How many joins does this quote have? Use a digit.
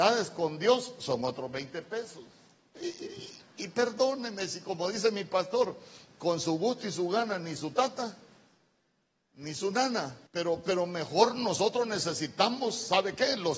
2